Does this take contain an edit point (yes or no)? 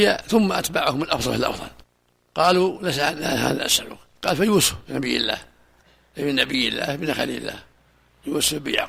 yes